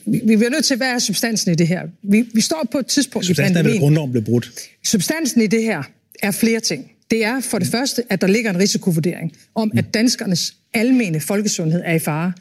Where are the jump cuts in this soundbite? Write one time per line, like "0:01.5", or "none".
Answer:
none